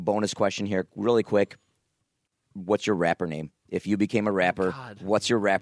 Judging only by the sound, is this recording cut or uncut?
uncut